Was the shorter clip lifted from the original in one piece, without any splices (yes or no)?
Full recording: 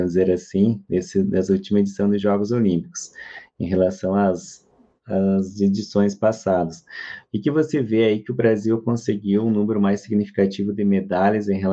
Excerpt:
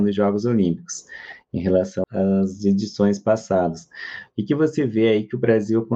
no